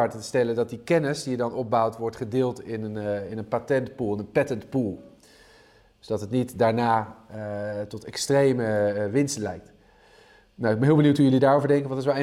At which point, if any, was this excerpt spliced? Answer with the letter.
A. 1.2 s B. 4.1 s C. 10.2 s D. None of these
D